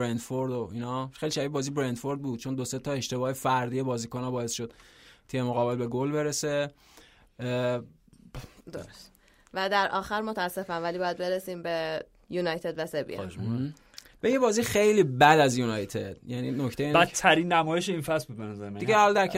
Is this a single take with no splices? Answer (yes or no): no